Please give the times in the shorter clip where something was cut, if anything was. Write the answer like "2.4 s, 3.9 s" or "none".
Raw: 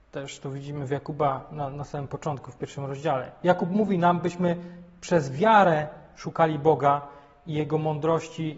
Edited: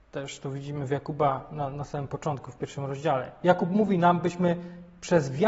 none